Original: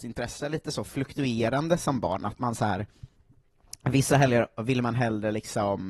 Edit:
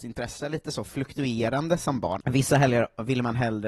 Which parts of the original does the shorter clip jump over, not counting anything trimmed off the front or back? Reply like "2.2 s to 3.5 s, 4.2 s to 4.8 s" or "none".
2.2 s to 3.8 s